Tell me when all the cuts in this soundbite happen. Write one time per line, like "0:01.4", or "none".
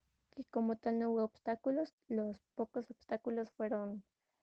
0:01.9